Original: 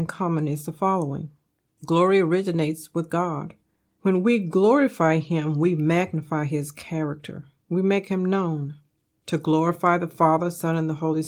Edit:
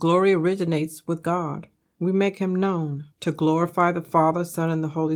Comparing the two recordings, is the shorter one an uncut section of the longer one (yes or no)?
no